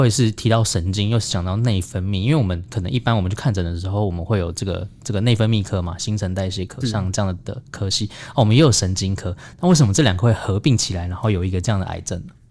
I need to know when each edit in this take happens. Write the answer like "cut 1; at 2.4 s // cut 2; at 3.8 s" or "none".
cut 1; at 6.8 s